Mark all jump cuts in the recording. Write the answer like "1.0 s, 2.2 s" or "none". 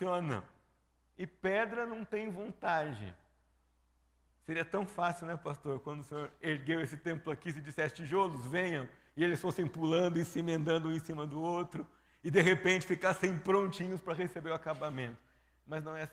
1.0 s